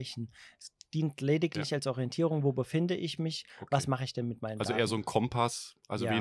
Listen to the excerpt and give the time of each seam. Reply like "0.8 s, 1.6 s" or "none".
none

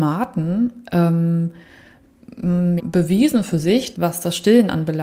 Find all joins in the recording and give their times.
2.8 s, 3.9 s

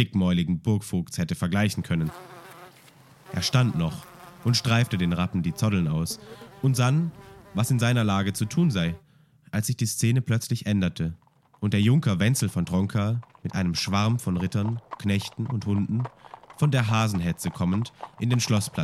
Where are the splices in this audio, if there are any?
none

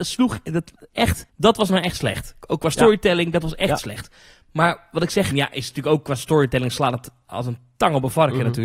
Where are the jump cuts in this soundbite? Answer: 1.3 s, 5.3 s

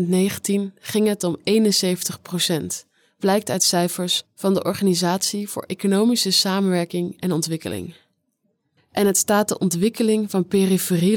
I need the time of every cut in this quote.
8.8 s

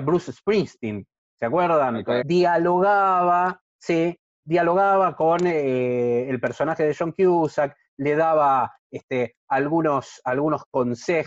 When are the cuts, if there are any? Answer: 2.2 s

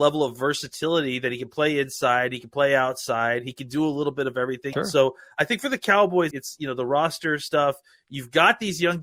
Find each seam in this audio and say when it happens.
4.7 s, 6.3 s

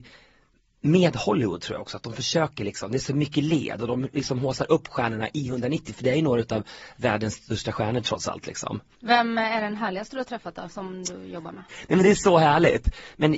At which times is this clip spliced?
8.9 s, 11.7 s

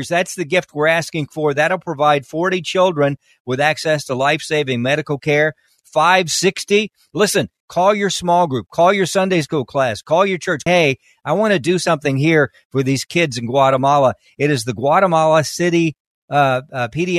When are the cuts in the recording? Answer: 7.6 s, 10.7 s

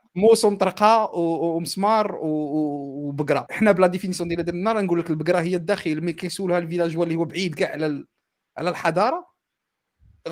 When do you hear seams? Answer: 3.5 s

